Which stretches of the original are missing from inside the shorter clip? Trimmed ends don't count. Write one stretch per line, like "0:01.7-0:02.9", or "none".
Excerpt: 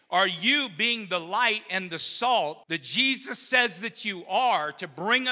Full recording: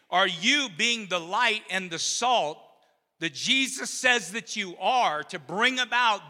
0:02.6-0:03.1

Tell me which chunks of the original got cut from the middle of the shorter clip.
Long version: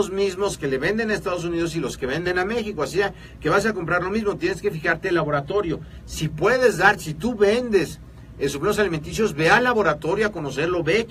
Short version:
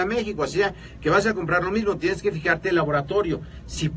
none

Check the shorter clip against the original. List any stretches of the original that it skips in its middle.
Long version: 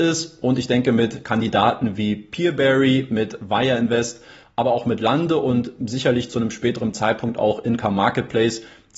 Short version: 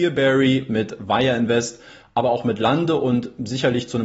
none

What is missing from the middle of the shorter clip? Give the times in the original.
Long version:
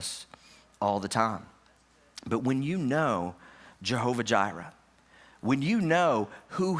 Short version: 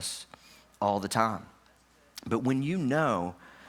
none

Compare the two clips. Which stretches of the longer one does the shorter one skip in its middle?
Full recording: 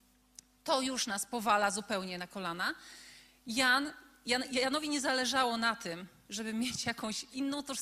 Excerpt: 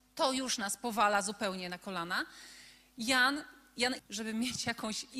0:04.5-0:06.2

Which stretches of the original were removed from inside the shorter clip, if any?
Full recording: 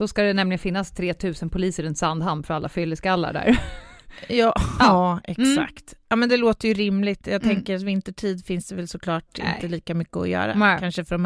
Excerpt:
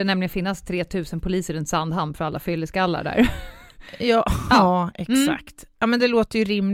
none

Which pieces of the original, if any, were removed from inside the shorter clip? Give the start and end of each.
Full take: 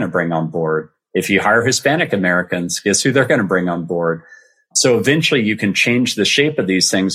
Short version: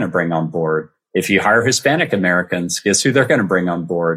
none

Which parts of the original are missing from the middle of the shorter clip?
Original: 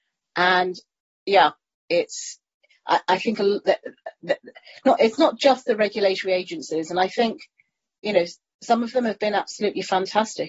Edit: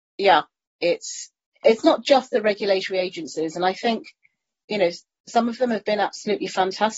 0:02.7-0:05.0

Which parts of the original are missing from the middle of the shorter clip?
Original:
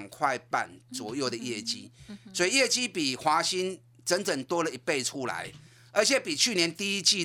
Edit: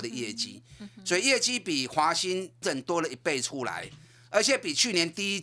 0:03.9-0:04.2

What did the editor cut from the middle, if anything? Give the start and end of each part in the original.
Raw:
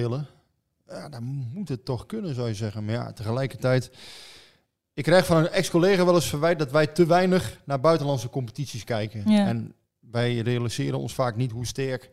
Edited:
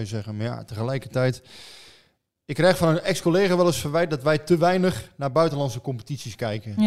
none

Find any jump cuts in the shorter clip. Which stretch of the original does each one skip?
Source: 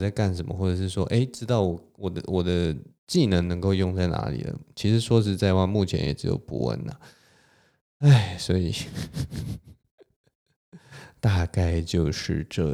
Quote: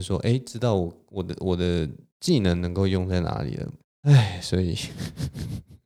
0:04.7-0:07.8

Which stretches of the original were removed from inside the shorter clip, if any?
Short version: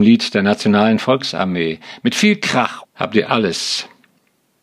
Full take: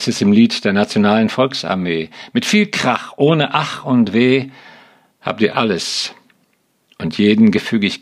0:03.1-0:05.1

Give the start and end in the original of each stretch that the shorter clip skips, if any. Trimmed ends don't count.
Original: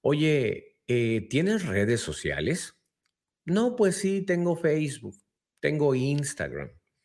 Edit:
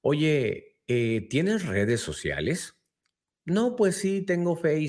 none

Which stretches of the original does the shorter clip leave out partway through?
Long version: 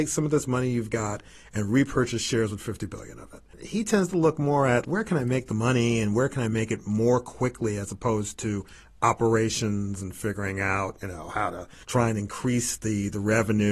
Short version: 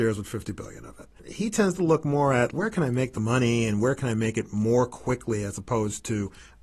none

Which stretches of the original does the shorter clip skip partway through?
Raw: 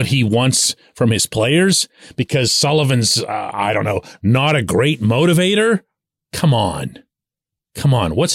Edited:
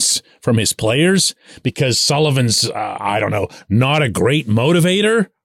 none

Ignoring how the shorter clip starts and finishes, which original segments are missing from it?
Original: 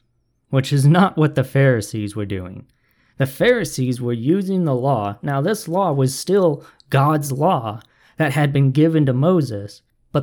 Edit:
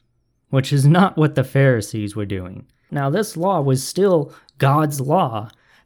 0:02.9-0:05.2

